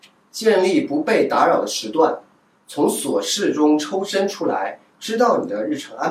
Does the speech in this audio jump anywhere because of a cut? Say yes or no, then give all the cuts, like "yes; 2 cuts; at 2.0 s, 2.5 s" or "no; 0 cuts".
yes; 1 cut; at 4.9 s